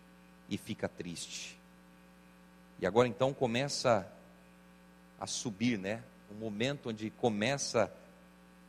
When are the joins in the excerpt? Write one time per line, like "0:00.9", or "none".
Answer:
none